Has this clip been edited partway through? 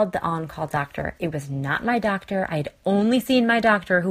no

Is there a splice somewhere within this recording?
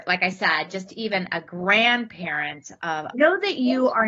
yes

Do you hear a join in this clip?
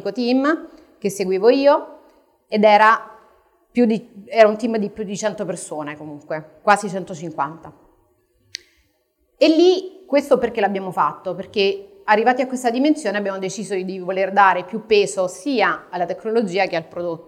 no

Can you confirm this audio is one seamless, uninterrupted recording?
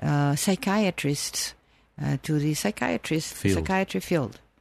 yes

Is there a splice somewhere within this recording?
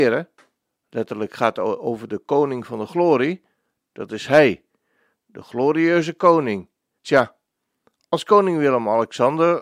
yes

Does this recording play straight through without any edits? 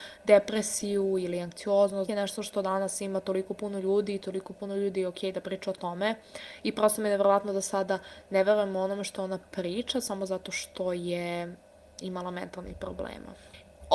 no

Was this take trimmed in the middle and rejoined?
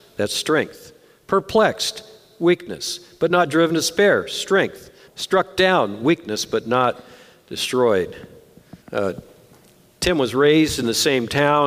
yes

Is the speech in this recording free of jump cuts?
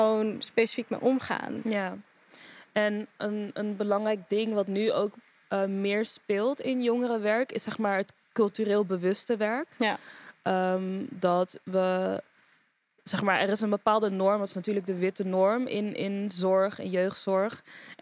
yes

